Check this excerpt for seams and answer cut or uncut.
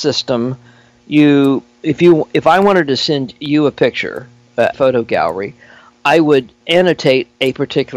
cut